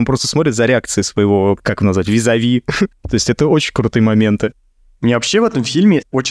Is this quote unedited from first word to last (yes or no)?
no